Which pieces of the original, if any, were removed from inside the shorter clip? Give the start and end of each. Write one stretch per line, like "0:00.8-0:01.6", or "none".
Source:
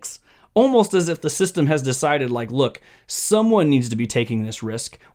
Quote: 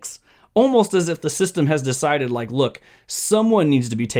none